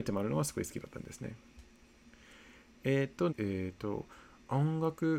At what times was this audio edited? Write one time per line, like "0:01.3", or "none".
0:03.3